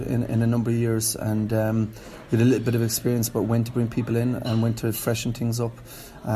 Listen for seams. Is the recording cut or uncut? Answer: uncut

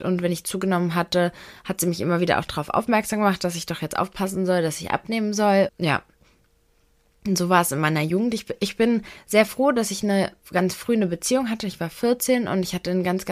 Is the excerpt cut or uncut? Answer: cut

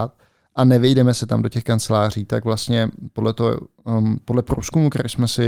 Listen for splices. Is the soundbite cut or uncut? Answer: uncut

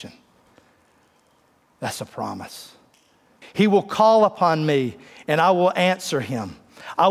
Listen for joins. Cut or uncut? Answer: cut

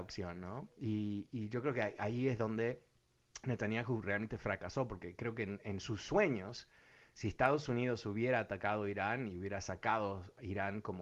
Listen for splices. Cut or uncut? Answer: uncut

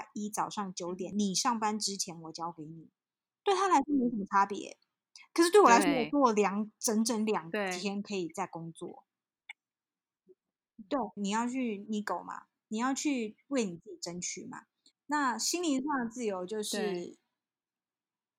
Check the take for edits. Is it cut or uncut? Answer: cut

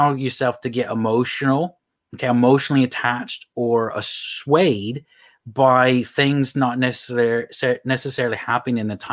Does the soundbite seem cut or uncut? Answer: uncut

